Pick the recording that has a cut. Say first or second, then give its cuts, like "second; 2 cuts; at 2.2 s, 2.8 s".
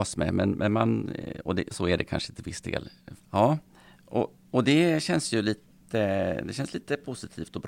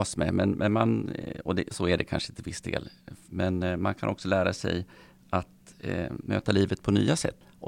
first; 1 cut; at 3.2 s